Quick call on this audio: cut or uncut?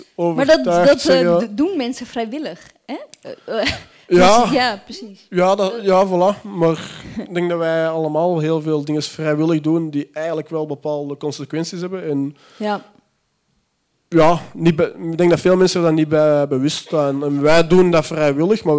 uncut